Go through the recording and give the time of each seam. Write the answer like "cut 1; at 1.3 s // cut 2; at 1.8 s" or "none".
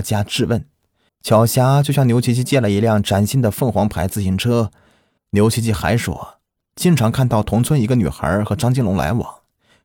cut 1; at 1.1 s // cut 2; at 5.2 s